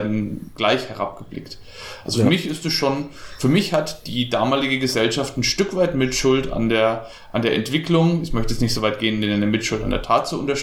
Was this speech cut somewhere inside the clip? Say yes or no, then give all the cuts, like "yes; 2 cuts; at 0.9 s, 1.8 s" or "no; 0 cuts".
no; 0 cuts